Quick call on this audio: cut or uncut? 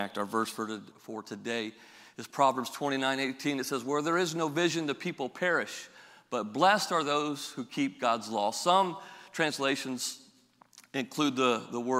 cut